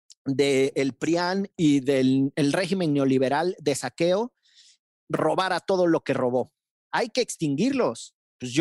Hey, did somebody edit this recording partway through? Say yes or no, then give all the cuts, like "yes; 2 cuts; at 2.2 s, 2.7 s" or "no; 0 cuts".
yes; 1 cut; at 6.7 s